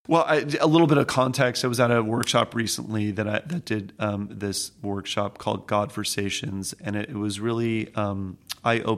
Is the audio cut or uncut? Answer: uncut